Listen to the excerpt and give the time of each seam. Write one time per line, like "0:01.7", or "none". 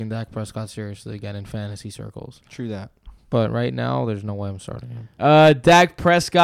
0:05.2